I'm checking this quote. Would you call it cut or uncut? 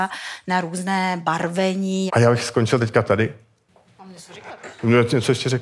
cut